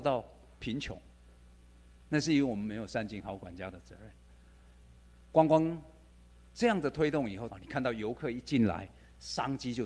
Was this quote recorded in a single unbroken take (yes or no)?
no